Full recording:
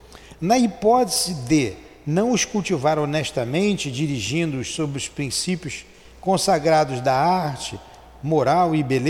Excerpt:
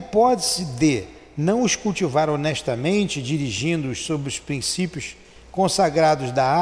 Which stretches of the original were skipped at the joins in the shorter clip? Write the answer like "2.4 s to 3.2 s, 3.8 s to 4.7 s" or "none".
none